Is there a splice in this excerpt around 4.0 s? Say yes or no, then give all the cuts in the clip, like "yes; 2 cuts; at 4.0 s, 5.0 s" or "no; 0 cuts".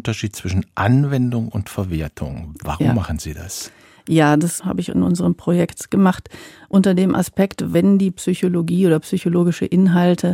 no; 0 cuts